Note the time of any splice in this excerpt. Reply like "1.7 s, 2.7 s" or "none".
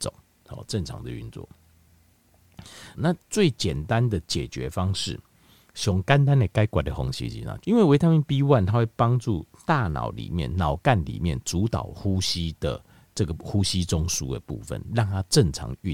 3.0 s, 7.6 s